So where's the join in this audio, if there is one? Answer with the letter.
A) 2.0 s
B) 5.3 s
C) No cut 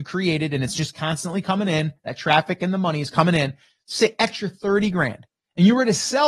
C